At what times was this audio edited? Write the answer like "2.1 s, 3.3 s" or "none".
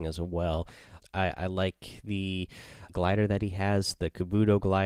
1.0 s, 2.9 s